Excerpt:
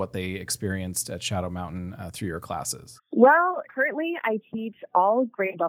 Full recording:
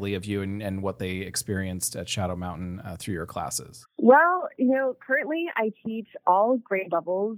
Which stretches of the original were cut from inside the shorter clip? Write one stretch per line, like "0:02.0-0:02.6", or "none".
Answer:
0:04.5-0:05.0